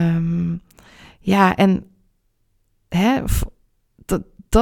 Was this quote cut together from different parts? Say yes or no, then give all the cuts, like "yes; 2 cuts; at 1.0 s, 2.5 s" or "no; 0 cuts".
no; 0 cuts